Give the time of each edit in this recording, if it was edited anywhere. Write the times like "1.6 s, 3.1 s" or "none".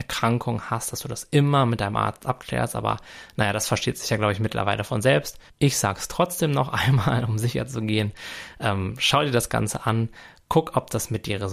5.5 s